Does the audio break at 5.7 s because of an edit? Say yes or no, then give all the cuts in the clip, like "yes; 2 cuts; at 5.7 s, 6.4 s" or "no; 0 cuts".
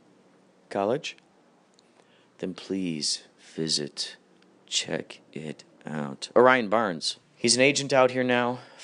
no; 1 cut; at 7.2 s